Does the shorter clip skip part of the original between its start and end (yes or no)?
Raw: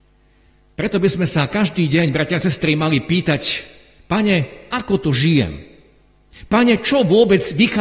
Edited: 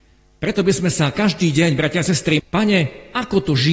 yes